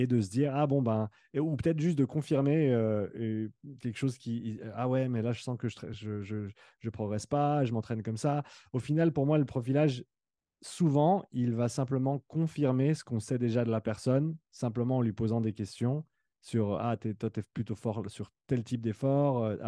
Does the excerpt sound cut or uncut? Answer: uncut